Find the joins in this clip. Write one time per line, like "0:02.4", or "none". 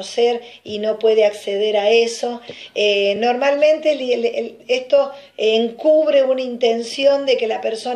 none